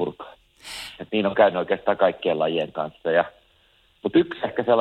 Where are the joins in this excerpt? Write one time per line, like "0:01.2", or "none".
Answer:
0:01.0